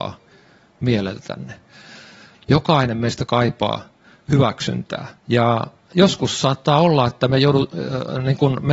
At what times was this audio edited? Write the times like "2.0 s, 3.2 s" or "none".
2.3 s, 5.2 s